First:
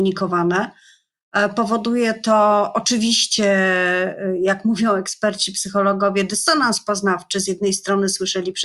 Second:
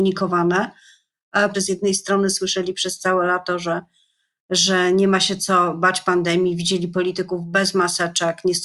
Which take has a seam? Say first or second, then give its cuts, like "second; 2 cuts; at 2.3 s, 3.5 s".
second; 1 cut; at 1.5 s